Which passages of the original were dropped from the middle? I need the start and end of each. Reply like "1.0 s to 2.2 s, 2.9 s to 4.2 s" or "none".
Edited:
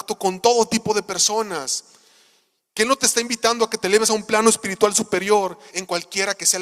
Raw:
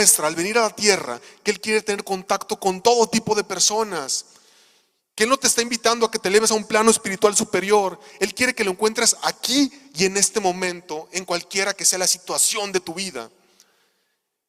8.1 s to 11.1 s